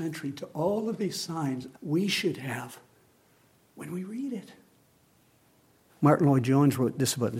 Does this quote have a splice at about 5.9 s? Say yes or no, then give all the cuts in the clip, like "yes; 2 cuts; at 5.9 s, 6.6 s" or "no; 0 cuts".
yes; 2 cuts; at 1.7 s, 5.9 s